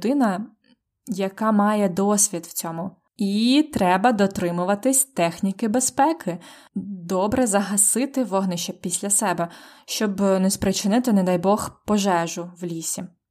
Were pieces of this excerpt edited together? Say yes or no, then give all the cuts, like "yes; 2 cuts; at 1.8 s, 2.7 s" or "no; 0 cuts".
yes; 1 cut; at 3.1 s